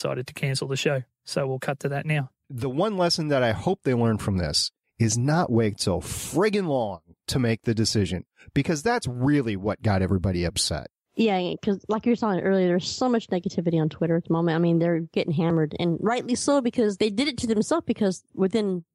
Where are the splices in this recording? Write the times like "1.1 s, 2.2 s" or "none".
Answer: none